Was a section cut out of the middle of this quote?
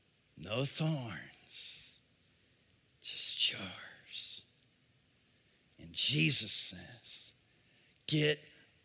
no; 0 cuts

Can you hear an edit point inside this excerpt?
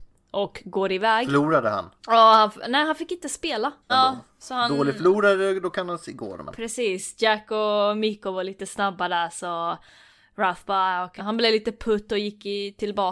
yes; 3 cuts; at 2.0 s, 3.9 s, 11.2 s

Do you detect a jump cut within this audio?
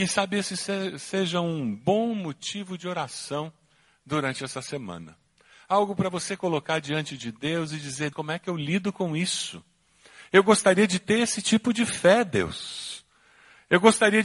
yes; 1 cut; at 8.1 s

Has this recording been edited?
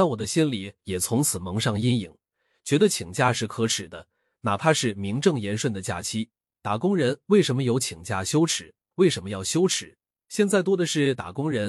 yes; 1 cut; at 8.9 s

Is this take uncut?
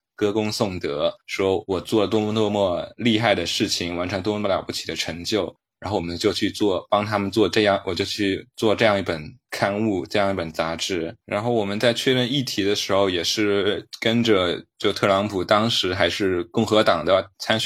yes; 0 cuts

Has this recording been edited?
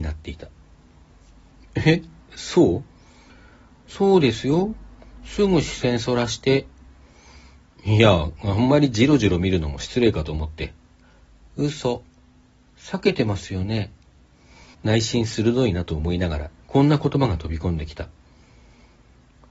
yes; 2 cuts; at 14.7 s, 16.6 s

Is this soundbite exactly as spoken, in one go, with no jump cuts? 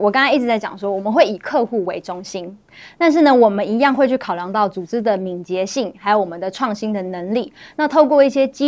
yes; 0 cuts

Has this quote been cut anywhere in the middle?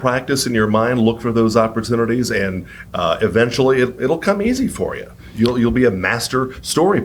no; 0 cuts

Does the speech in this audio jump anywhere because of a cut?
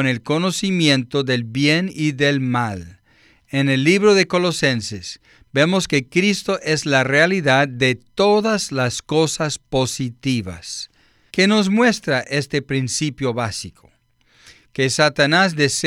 yes; 1 cut; at 11.3 s

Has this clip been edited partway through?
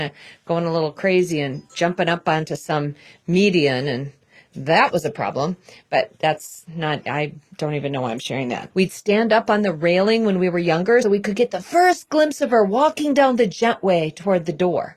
yes; 2 cuts; at 8.7 s, 11.0 s

